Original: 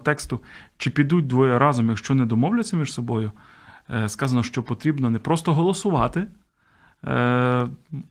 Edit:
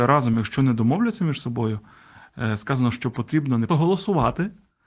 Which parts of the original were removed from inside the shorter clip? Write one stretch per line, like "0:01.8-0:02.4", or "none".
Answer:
0:05.2-0:05.5